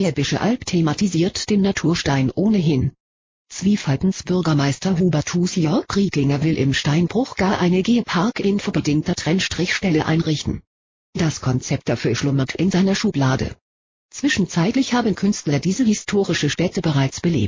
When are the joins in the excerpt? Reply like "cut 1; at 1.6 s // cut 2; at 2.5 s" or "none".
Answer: cut 1; at 12.5 s

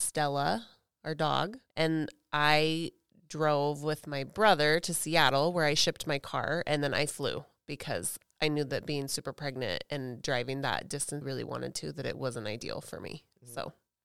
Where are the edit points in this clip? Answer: cut 1; at 11.2 s

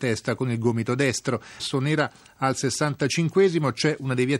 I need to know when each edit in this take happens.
cut 1; at 1.6 s

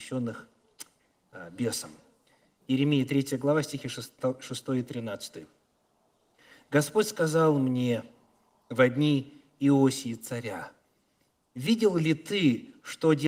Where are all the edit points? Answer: none

